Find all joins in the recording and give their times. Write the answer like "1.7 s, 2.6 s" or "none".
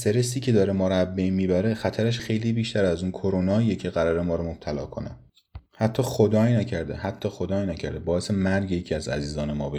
2.2 s